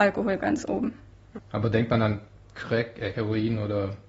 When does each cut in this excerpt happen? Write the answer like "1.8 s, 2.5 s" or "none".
1.4 s, 3.1 s